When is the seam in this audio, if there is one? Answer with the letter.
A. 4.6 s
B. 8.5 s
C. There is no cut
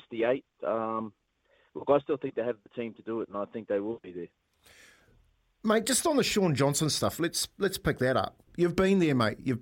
B